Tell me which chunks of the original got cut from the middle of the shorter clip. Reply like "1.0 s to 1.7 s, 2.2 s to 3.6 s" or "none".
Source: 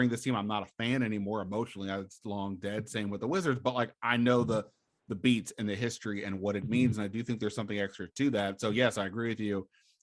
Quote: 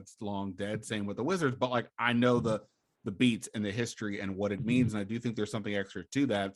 none